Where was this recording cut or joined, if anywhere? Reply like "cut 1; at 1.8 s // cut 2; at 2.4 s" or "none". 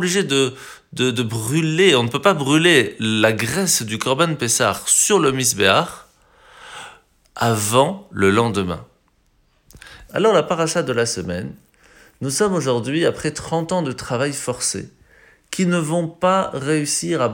cut 1; at 10.1 s